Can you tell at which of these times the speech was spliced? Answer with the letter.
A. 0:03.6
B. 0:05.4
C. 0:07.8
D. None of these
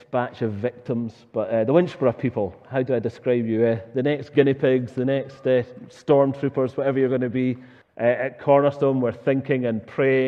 C